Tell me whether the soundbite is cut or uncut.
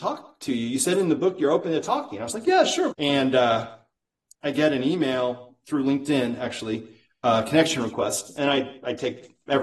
cut